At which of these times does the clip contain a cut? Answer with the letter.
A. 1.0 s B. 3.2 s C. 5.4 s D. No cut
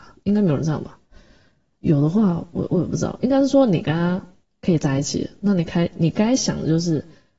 D